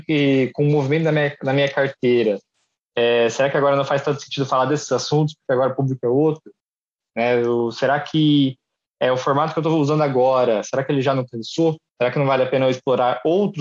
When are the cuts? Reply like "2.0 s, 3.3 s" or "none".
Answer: 11.9 s